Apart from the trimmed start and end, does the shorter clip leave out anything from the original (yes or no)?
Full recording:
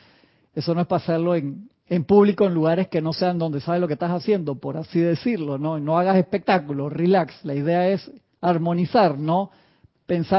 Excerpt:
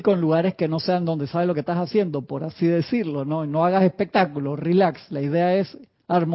no